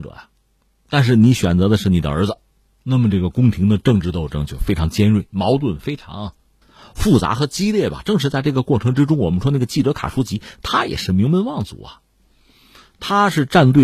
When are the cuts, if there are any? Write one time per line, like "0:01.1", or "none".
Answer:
none